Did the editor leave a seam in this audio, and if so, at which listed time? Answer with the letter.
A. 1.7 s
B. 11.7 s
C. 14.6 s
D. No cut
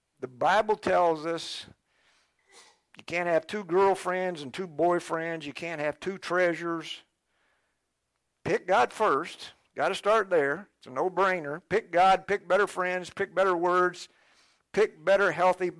D